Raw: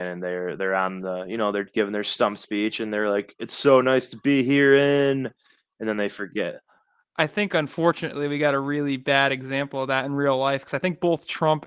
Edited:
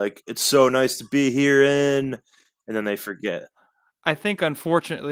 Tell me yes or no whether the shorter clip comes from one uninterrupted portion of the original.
yes